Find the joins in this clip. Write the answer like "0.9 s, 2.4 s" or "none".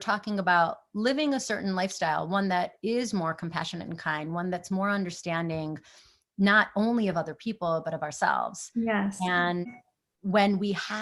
none